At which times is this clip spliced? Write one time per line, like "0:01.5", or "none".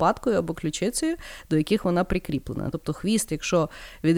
none